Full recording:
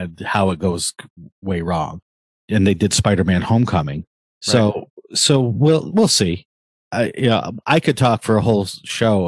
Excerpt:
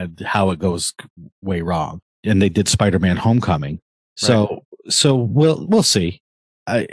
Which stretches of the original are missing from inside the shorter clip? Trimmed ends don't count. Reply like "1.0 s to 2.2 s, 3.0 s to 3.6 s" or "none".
2.1 s to 2.4 s